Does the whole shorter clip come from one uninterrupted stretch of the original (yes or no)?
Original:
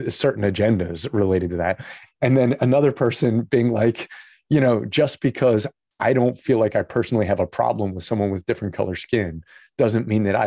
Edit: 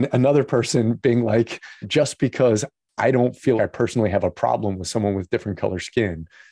no